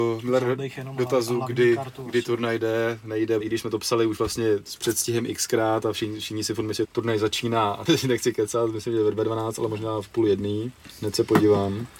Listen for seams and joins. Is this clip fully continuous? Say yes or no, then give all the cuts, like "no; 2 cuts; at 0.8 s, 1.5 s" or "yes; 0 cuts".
no; 3 cuts; at 3.4 s, 6.8 s, 7.9 s